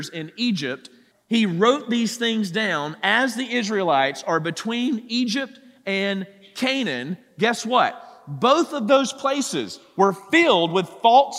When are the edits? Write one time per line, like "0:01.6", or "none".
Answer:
0:01.1